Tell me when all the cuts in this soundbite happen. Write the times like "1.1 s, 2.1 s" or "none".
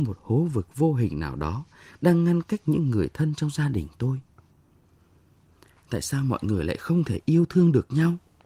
5.8 s